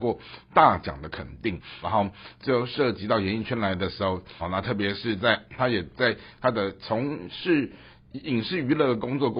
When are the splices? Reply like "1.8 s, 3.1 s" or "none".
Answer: 1.8 s, 4.4 s